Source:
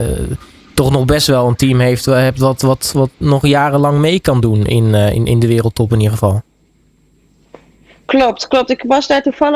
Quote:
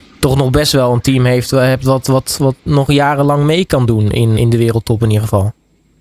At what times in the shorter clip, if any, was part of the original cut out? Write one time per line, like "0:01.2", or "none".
0:04.4